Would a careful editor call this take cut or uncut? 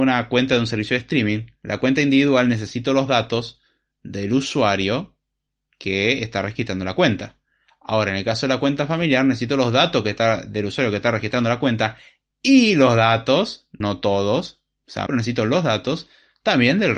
cut